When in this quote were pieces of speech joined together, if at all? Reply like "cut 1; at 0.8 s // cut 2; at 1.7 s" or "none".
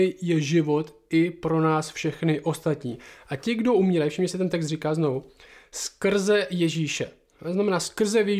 none